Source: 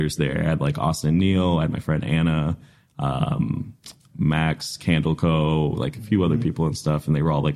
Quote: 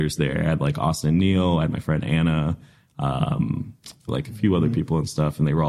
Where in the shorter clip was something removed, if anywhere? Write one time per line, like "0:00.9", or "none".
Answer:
0:04.1